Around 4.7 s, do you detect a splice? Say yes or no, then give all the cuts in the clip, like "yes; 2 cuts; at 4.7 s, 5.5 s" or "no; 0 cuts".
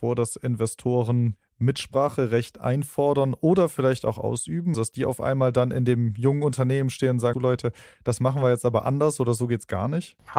yes; 2 cuts; at 4.7 s, 7.3 s